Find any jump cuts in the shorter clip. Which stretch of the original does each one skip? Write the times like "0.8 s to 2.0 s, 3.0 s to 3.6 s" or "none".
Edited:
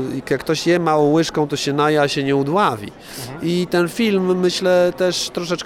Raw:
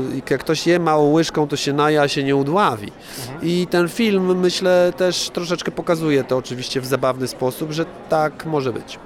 none